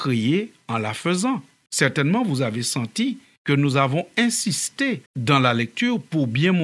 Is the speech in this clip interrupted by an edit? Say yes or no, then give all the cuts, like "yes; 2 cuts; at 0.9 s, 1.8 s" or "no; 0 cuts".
yes; 2 cuts; at 1.7 s, 5.1 s